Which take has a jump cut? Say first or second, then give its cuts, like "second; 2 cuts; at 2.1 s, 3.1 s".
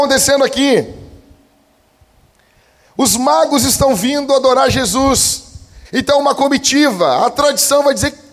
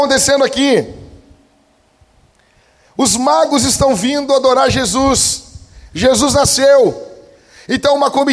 first; 1 cut; at 5.8 s